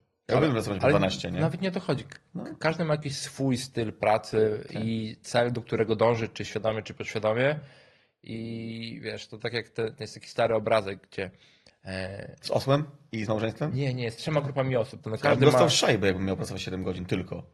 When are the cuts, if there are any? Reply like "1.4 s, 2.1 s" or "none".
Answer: 15.0 s